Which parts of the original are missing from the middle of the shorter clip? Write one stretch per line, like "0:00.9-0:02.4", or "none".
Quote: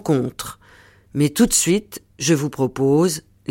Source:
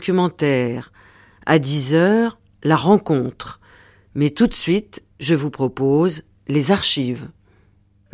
none